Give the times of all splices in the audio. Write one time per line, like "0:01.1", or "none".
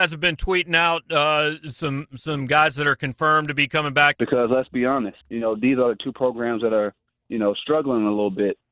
0:04.1
0:05.2